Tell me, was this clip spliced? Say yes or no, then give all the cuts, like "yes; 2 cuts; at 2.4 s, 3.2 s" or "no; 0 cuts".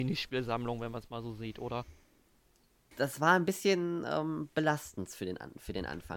yes; 1 cut; at 2.9 s